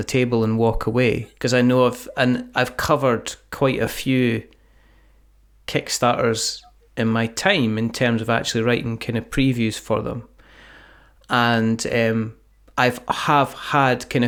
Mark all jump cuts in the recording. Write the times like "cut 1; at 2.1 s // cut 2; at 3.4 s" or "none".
cut 1; at 1.4 s